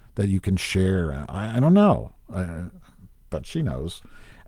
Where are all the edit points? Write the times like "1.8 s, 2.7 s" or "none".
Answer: none